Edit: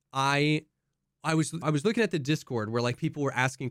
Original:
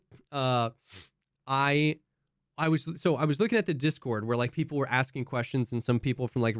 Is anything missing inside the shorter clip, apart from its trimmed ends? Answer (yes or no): yes